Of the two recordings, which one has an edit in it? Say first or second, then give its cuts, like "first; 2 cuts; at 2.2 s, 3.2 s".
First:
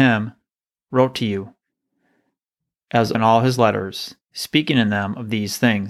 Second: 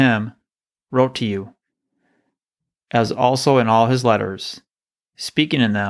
first; 2 cuts; at 3.1 s, 4.2 s